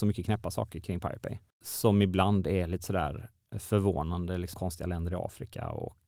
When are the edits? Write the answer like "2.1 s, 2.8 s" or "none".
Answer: 4.5 s